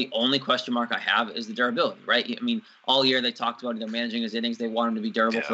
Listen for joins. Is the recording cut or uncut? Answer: uncut